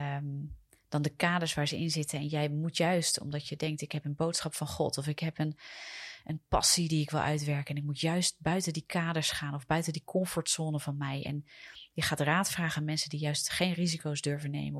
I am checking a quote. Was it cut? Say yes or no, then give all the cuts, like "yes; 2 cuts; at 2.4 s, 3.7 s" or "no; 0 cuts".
no; 0 cuts